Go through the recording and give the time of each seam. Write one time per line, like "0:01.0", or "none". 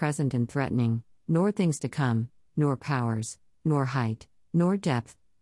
none